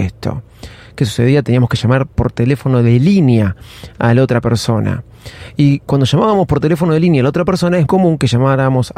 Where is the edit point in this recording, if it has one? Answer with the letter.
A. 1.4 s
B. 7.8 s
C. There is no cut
B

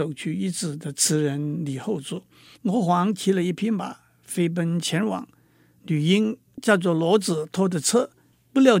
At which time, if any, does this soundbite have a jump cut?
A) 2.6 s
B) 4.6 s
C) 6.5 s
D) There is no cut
A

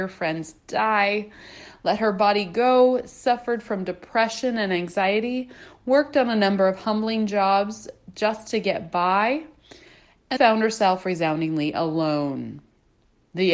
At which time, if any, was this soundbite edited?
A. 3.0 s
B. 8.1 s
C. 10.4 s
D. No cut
C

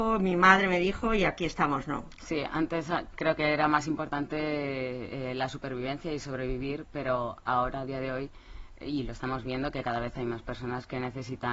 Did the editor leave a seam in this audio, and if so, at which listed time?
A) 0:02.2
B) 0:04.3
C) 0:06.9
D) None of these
A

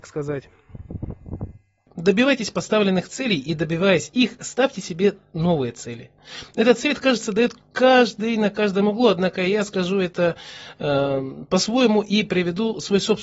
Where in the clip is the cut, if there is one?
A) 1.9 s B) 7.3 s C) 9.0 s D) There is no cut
A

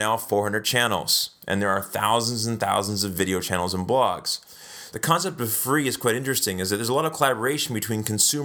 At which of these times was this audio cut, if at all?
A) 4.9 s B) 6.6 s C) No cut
A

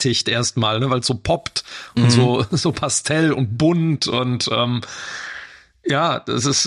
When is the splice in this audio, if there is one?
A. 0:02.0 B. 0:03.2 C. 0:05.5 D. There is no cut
D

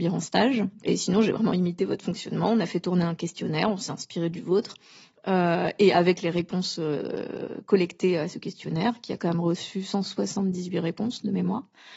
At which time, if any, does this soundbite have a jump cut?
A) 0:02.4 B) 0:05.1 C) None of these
C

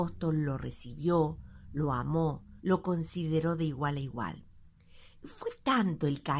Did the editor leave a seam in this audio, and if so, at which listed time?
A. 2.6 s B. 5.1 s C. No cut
A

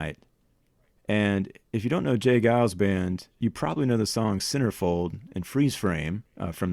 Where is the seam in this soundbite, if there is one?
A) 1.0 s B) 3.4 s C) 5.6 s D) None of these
D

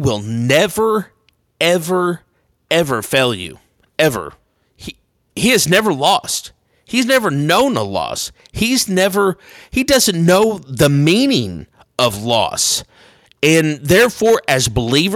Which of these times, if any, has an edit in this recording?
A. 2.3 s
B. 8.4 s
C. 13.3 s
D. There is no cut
D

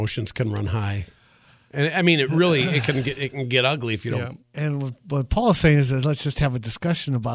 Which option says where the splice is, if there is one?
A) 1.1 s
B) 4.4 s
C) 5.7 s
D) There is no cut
B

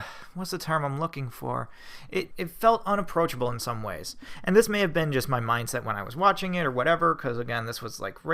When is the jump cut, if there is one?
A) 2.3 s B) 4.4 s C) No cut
A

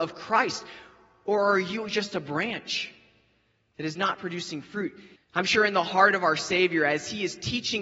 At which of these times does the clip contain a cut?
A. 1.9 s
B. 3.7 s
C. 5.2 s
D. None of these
C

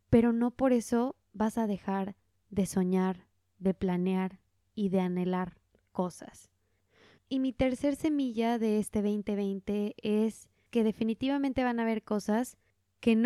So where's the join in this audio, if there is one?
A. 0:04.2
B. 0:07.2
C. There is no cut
B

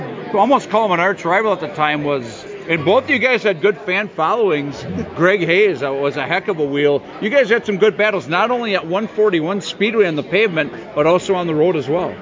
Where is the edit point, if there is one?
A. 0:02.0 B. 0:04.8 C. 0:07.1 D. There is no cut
D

